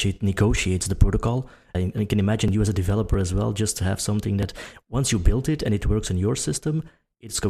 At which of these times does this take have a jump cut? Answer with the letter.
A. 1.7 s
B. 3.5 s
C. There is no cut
A